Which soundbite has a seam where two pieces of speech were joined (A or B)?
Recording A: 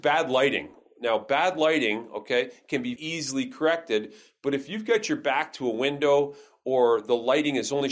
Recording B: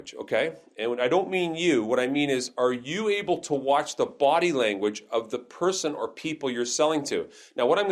A